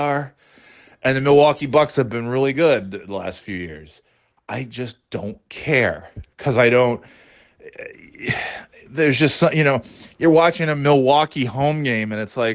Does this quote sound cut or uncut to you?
uncut